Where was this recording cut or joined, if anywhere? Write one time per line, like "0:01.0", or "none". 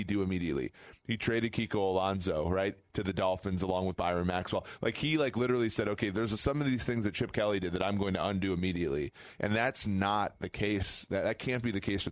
none